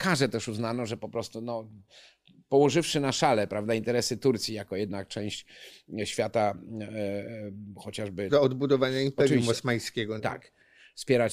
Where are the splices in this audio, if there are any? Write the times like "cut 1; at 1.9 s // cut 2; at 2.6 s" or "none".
cut 1; at 8.3 s // cut 2; at 10.2 s